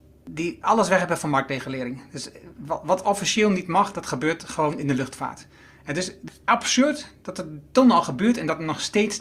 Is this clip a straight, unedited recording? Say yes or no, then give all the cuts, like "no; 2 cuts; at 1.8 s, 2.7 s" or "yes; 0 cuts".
yes; 0 cuts